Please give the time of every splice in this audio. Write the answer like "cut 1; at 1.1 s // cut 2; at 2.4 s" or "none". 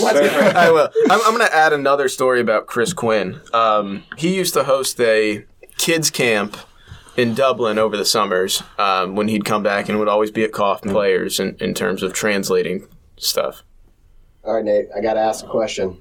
cut 1; at 4.2 s // cut 2; at 10.9 s

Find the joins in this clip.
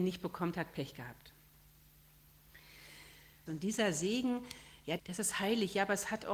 cut 1; at 3.5 s // cut 2; at 5.0 s

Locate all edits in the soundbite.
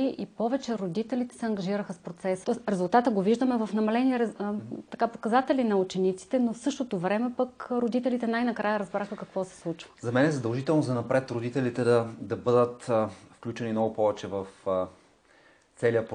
cut 1; at 2.4 s

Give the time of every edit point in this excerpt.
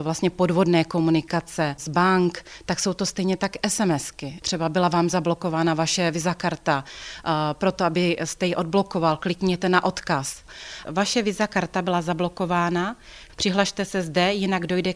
cut 1; at 10.8 s // cut 2; at 13.3 s

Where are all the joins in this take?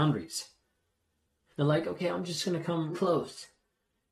cut 1; at 1.5 s // cut 2; at 2.9 s

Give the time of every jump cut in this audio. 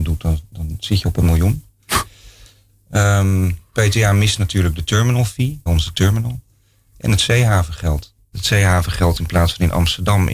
cut 1; at 5.7 s // cut 2; at 8.3 s

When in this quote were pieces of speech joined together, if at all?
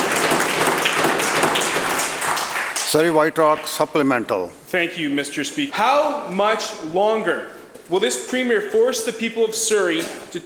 cut 1; at 5.7 s

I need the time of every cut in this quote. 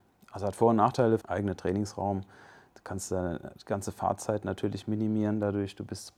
cut 1; at 1.2 s

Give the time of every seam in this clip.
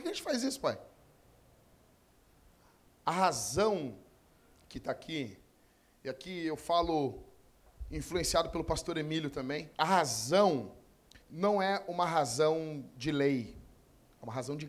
cut 1; at 9.7 s // cut 2; at 11.2 s

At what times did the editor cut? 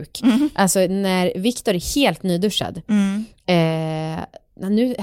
none

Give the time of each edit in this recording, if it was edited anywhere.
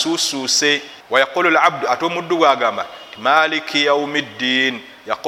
cut 1; at 1.0 s

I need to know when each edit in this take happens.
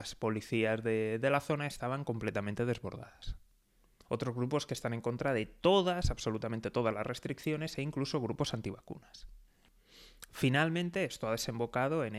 cut 1; at 4.0 s

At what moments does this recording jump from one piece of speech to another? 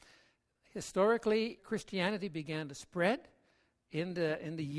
cut 1; at 1.6 s

